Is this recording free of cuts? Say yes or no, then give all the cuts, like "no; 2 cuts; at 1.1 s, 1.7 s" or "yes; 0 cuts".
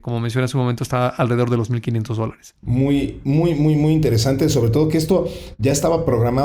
yes; 0 cuts